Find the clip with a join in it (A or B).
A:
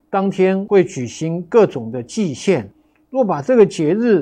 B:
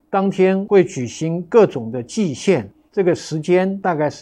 B